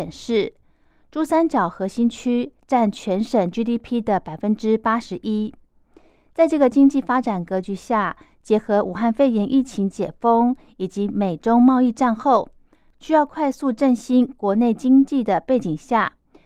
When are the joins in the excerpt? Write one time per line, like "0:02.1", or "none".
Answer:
none